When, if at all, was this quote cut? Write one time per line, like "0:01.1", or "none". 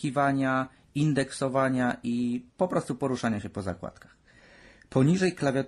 none